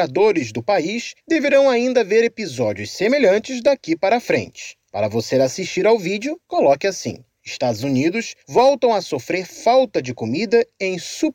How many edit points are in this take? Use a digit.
0